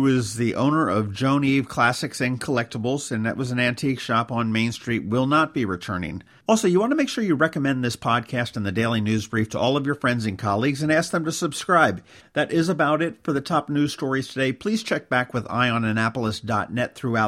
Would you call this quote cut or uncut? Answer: cut